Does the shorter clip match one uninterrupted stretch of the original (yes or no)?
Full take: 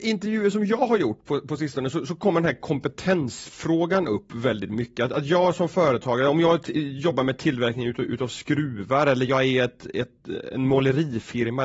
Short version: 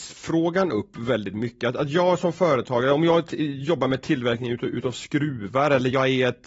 yes